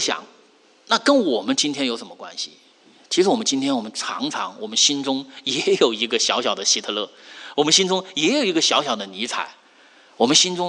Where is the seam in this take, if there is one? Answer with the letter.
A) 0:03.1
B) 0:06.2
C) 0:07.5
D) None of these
D